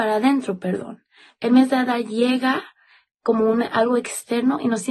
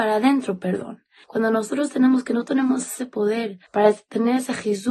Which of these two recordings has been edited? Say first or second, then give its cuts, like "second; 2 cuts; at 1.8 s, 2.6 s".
second; 2 cuts; at 1.2 s, 3.7 s